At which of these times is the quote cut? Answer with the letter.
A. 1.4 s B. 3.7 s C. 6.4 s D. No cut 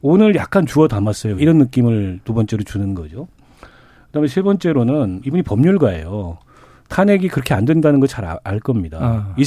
A